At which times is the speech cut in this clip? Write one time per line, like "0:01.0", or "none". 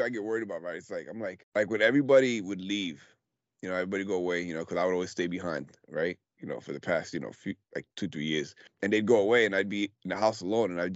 none